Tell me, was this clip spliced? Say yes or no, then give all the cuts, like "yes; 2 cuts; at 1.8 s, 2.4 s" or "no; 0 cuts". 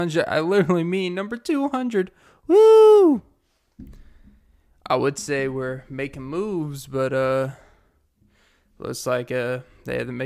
no; 0 cuts